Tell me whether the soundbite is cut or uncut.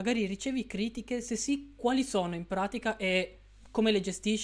uncut